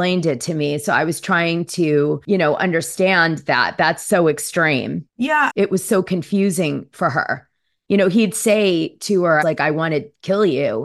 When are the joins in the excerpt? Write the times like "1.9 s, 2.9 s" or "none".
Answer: 5.5 s, 9.4 s

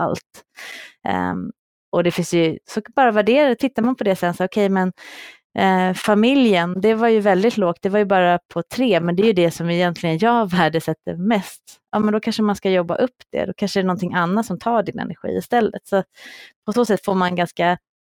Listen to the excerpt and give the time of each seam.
none

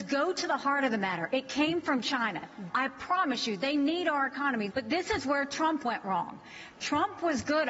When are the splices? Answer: 2.7 s, 4.7 s

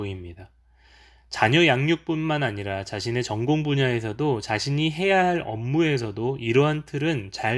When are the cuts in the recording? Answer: none

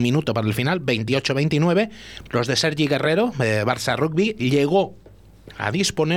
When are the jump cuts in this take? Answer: 2.3 s

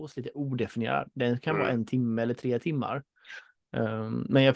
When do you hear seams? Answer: 3.5 s

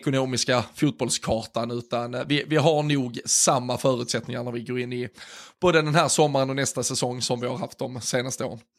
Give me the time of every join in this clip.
none

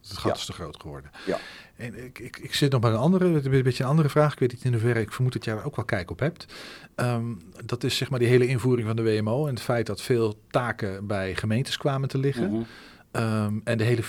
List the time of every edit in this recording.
none

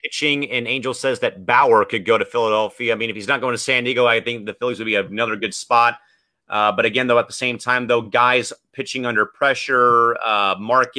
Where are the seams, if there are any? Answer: none

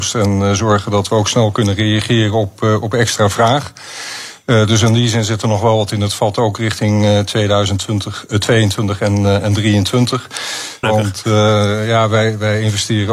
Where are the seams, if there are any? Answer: 10.8 s

